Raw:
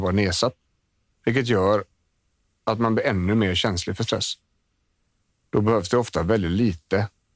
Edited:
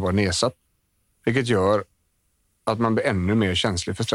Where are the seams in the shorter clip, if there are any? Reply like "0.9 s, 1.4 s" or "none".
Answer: none